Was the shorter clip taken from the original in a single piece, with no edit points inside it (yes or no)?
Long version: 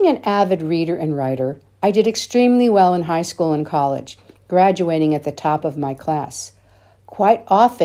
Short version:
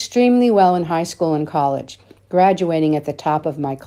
yes